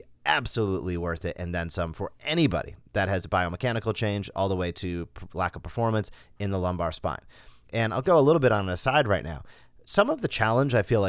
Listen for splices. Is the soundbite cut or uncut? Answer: cut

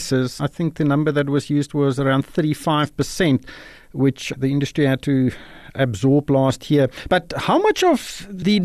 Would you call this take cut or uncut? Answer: uncut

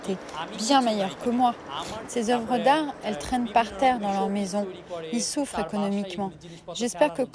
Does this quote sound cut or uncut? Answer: cut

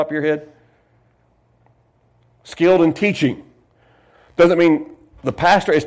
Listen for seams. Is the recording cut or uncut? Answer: uncut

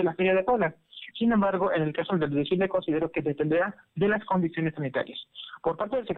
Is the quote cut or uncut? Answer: cut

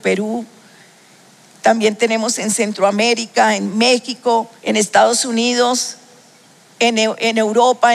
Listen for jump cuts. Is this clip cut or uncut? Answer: cut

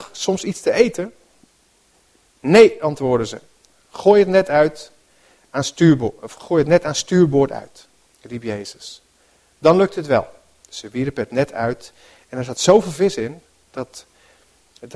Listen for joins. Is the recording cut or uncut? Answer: uncut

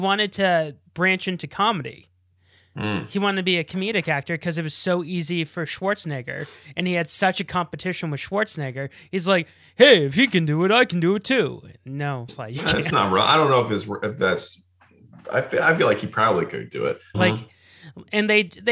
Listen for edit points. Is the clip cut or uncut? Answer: cut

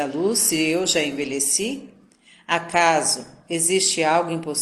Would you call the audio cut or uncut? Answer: uncut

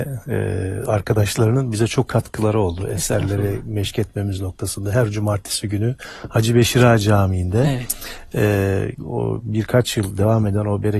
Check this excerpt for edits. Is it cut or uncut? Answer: cut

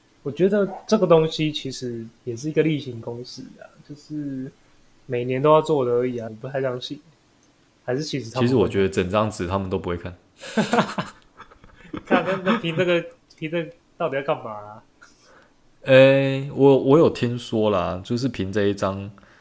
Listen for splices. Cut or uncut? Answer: cut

